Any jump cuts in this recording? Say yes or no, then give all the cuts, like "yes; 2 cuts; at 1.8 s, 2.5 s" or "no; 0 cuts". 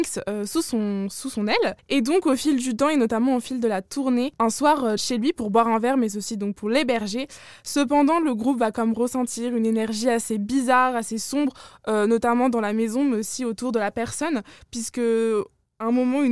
yes; 1 cut; at 5.0 s